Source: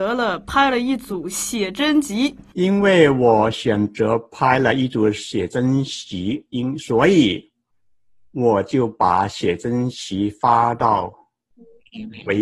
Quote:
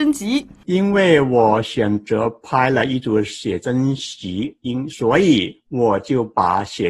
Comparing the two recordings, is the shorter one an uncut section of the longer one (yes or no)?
no